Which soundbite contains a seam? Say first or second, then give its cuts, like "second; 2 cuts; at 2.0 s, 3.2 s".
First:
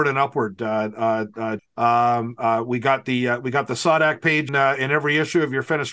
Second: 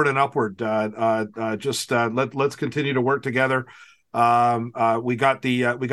first; 2 cuts; at 1.6 s, 4.5 s